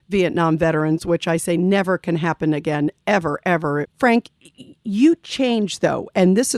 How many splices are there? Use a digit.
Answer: 1